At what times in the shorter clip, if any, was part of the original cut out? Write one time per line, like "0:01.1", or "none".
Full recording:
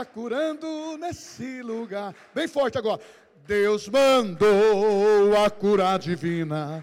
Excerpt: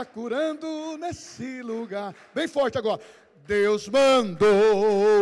none